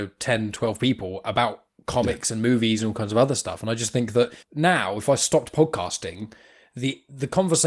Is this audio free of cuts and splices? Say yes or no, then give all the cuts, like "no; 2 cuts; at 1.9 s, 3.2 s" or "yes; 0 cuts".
no; 1 cut; at 4.4 s